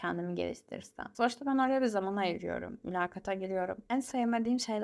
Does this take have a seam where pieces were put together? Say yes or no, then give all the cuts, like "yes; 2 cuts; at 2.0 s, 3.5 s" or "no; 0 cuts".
yes; 1 cut; at 3.9 s